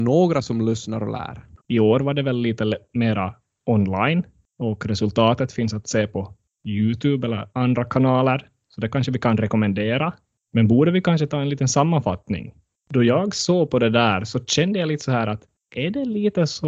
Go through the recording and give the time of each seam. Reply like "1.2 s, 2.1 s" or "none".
1.6 s, 12.8 s